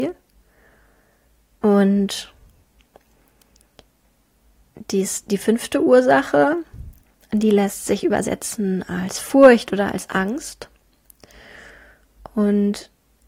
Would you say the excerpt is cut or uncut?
cut